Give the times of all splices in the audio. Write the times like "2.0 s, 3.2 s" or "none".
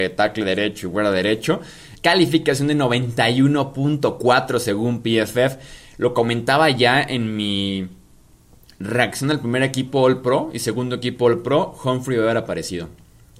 2.0 s